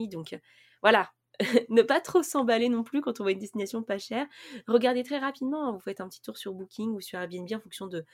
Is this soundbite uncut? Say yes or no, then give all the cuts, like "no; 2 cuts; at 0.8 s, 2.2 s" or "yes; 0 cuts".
yes; 0 cuts